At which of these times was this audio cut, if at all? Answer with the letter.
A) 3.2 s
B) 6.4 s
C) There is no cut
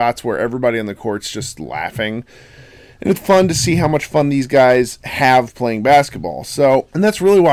A